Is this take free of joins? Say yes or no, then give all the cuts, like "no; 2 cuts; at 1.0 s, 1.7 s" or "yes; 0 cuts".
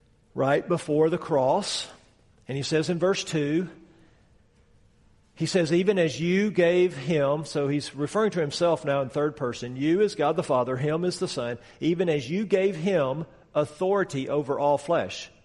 yes; 0 cuts